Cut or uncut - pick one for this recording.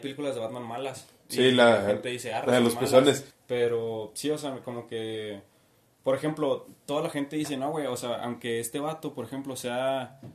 cut